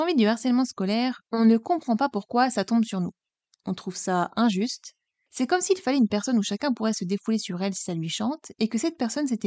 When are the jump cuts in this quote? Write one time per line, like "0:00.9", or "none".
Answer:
none